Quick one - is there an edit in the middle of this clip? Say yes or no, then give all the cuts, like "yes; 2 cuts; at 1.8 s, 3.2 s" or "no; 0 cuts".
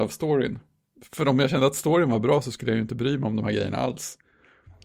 no; 0 cuts